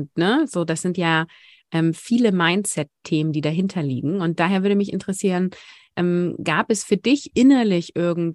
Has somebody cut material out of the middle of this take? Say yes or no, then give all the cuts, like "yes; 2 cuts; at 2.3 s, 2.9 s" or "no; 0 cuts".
no; 0 cuts